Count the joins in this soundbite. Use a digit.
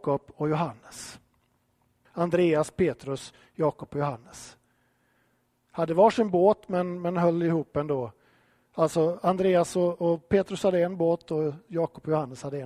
1